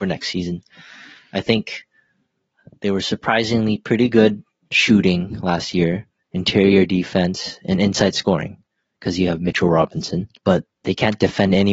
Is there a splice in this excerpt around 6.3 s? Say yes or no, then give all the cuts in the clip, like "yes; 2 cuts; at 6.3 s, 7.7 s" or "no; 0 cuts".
no; 1 cut; at 10.4 s